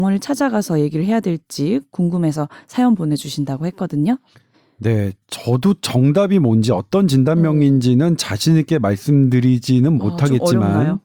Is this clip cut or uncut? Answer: uncut